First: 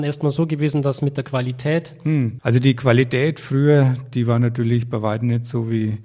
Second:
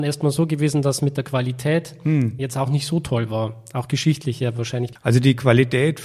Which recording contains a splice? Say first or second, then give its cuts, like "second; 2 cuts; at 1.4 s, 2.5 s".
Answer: first; 1 cut; at 2.4 s